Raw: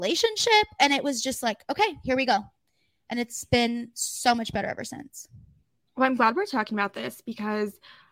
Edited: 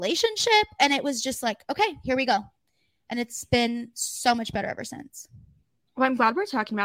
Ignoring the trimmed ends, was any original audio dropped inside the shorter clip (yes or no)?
no